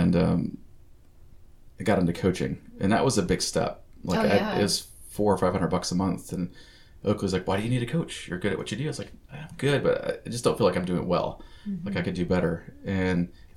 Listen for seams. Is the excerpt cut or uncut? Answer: uncut